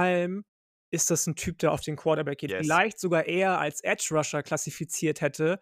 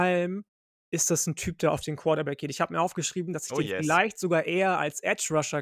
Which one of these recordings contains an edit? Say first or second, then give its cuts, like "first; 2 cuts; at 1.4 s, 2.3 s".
first; 1 cut; at 2.5 s